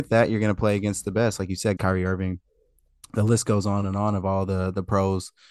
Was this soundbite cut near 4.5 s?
no; 1 cut; at 1.8 s

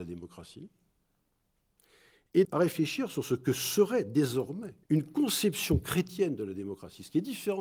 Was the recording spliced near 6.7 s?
no; 2 cuts; at 2.4 s, 4.8 s

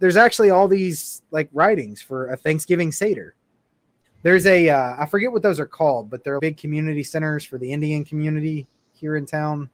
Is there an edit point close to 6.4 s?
yes; 2 cuts; at 4.0 s, 6.4 s

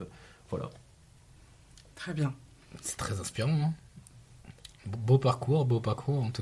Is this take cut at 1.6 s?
no; 0 cuts

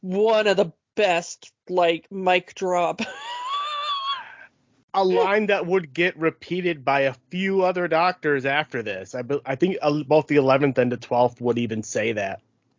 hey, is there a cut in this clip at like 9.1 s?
no; 0 cuts

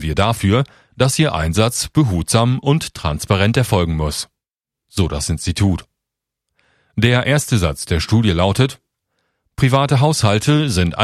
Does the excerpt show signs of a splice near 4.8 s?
no; 0 cuts

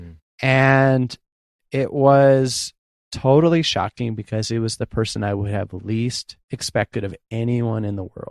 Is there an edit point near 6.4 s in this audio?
yes; 1 cut; at 6.4 s

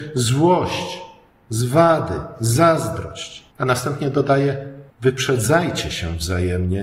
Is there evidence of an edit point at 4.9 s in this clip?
yes; 2 cuts; at 3.5 s, 4.9 s

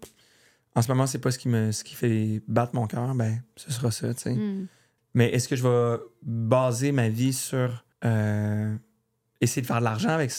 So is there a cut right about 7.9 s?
yes; 2 cuts; at 5.0 s, 7.9 s

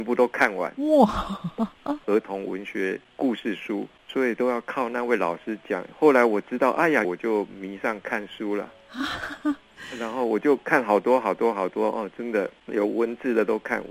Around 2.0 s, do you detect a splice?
yes; 2 cuts; at 2.0 s, 7.0 s

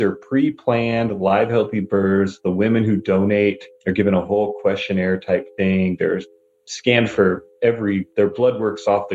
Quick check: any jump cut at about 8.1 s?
no; 1 cut; at 3.7 s

